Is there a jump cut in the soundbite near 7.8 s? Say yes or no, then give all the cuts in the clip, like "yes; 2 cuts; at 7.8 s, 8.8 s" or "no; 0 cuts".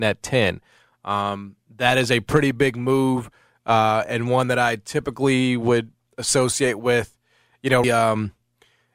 yes; 1 cut; at 7.8 s